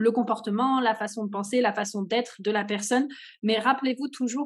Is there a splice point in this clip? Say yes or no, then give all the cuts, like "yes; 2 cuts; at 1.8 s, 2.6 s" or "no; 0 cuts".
no; 0 cuts